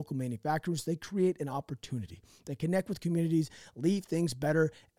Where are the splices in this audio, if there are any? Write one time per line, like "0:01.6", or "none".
none